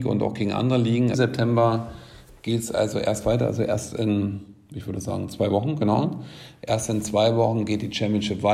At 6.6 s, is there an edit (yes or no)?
no